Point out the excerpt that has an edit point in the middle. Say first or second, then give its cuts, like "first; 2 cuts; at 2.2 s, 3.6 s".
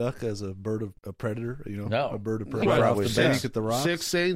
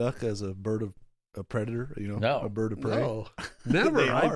first; 2 cuts; at 1.0 s, 2.6 s